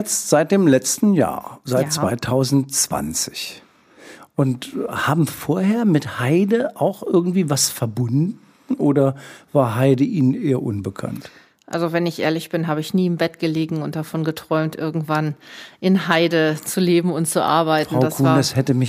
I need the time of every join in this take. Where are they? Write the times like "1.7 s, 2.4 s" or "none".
none

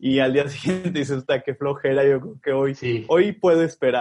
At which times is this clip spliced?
none

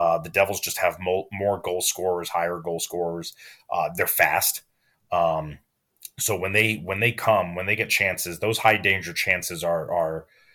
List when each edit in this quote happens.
none

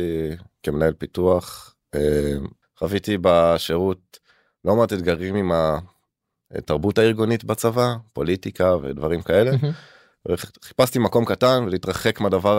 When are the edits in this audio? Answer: 2.6 s

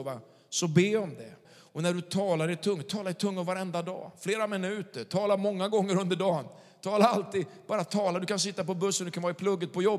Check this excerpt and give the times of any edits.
1.5 s

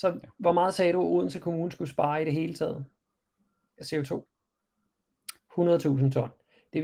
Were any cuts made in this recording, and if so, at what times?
5.4 s

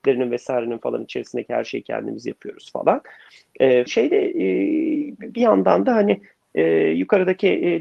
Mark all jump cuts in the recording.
3.9 s

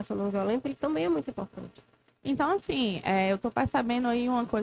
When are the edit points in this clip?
none

